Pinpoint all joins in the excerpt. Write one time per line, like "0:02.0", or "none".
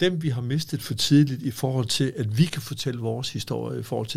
none